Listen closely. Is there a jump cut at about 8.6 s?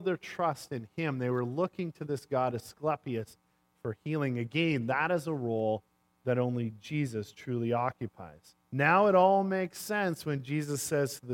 yes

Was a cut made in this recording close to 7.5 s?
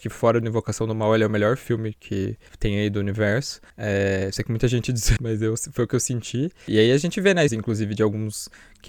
yes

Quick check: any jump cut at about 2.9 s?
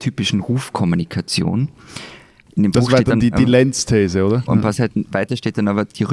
no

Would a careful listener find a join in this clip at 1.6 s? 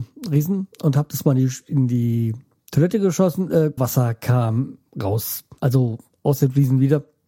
no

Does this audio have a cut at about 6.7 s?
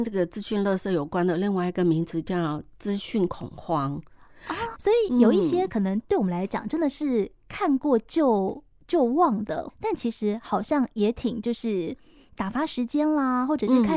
no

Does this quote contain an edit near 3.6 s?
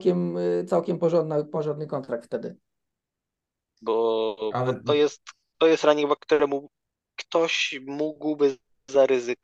yes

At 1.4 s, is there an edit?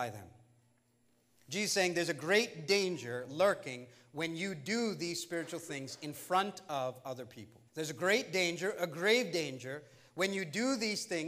no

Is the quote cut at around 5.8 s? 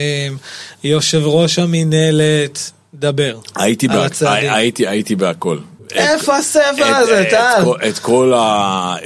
yes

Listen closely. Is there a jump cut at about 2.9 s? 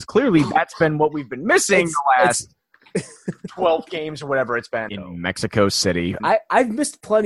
no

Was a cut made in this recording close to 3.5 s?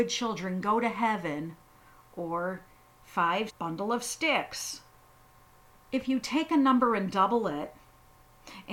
yes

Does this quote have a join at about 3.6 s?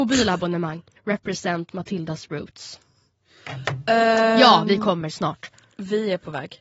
no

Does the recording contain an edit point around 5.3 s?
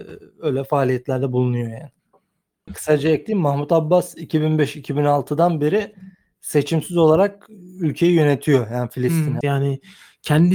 no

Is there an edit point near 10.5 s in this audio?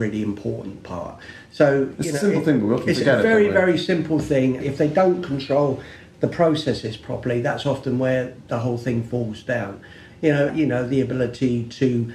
yes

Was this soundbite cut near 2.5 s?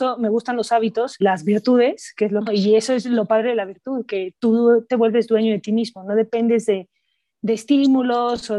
yes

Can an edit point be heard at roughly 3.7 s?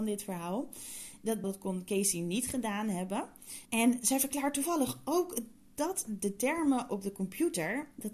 yes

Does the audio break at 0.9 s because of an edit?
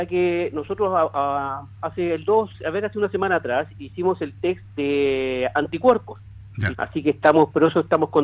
no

